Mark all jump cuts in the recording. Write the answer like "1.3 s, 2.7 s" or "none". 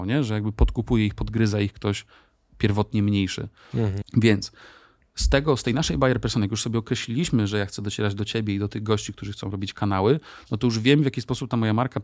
4.0 s